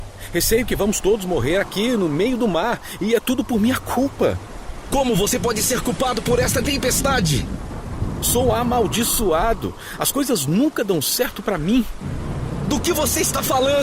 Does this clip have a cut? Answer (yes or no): no